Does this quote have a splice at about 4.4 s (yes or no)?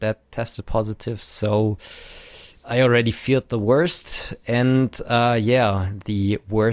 no